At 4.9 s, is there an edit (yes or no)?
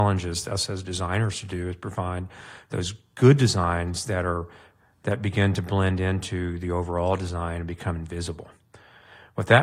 no